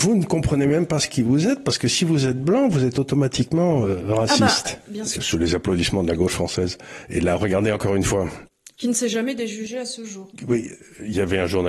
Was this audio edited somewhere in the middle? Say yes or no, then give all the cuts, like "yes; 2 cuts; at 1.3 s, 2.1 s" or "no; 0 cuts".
yes; 1 cut; at 5.2 s